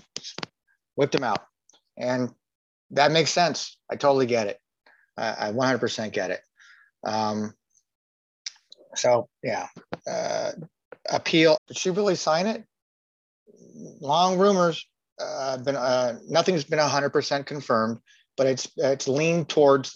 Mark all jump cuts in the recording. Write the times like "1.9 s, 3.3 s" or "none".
11.6 s